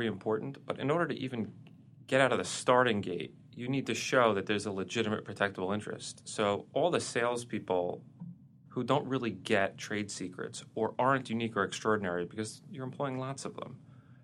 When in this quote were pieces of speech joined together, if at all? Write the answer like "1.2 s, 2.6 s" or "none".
8.7 s